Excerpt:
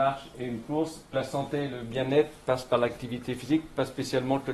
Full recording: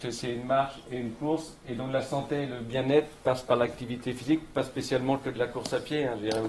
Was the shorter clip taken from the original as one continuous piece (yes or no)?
no